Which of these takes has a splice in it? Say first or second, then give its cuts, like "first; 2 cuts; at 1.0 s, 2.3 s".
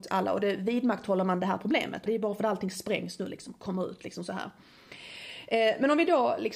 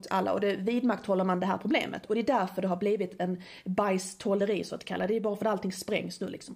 first; 1 cut; at 2.1 s